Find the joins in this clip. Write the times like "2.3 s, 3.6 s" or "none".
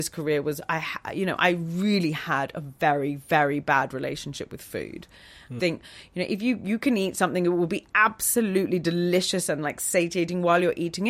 5.6 s